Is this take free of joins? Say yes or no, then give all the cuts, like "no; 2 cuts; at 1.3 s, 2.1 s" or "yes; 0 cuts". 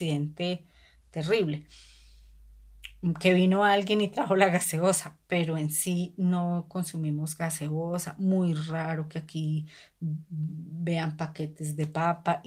yes; 0 cuts